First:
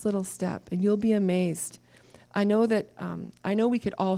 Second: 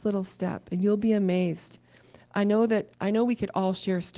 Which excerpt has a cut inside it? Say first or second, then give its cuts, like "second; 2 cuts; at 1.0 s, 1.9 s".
second; 1 cut; at 2.9 s